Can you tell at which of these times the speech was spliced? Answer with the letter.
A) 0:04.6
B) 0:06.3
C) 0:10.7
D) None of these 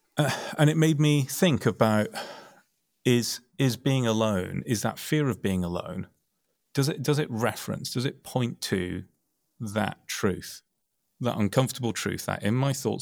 D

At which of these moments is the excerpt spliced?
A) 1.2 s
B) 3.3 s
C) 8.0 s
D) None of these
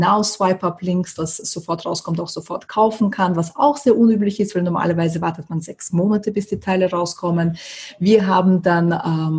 A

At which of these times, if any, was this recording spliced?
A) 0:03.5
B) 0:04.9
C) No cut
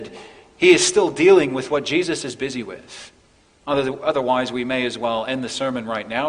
A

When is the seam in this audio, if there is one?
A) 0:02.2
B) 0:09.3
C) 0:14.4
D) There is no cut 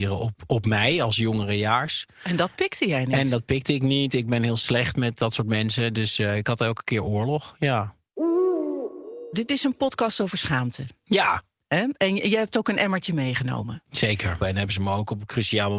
C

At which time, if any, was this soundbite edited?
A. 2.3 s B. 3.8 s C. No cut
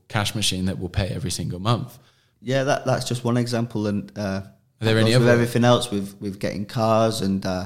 A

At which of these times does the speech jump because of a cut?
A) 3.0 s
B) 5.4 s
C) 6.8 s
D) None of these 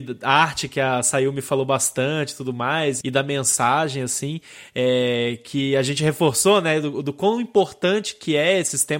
A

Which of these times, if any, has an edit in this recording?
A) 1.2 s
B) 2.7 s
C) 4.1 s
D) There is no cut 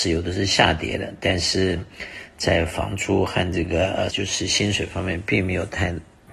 C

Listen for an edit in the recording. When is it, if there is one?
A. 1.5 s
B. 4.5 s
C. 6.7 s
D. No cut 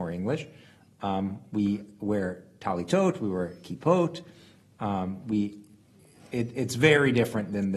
D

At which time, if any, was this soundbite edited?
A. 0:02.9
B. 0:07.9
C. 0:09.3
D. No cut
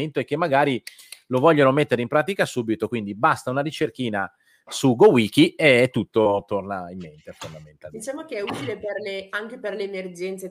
D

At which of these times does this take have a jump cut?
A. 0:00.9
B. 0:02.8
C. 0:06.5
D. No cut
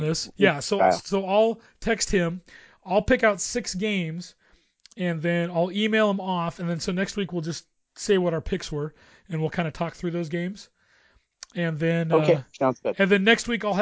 D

